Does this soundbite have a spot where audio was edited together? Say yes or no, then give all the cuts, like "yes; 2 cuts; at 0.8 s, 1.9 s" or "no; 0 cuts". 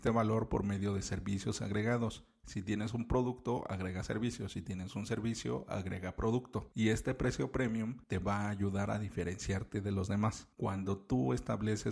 no; 0 cuts